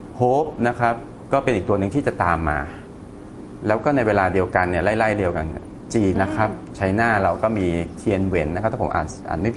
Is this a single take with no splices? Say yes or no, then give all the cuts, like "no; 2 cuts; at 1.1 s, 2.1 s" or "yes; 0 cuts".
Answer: no; 1 cut; at 6.1 s